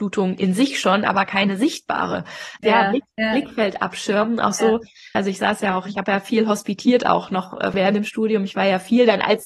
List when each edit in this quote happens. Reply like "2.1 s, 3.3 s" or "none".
2.6 s, 5.1 s, 7.7 s